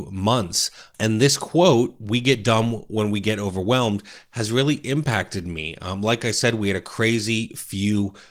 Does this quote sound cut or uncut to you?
uncut